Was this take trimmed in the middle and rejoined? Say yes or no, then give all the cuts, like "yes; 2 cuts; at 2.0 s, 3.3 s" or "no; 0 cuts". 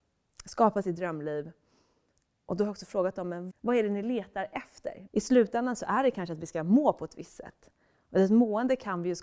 yes; 2 cuts; at 3.5 s, 5.1 s